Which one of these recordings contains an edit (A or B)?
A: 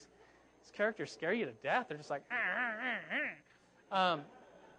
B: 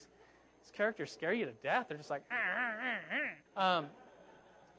B